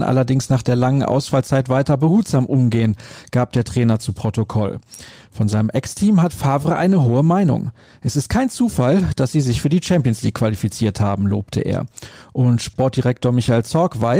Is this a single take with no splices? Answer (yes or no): yes